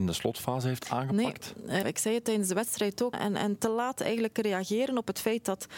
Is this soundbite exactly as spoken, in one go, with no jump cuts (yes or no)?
no